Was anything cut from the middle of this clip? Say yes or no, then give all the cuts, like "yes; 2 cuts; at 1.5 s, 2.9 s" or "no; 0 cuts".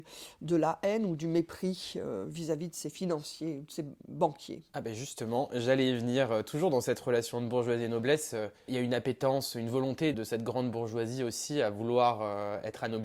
yes; 2 cuts; at 8.7 s, 10.1 s